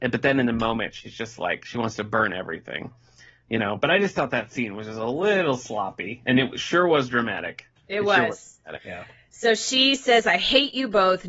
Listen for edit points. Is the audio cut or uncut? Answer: cut